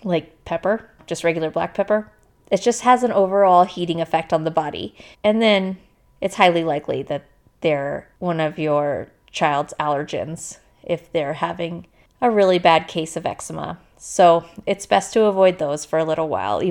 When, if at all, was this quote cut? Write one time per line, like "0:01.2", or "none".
0:05.1